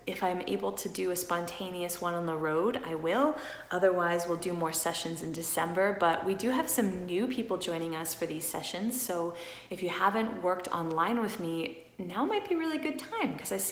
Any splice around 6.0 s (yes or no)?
no